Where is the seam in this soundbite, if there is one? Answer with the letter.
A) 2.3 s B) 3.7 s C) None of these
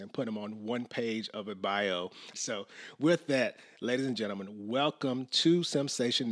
A